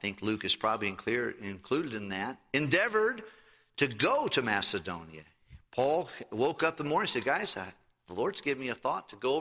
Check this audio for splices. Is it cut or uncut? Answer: uncut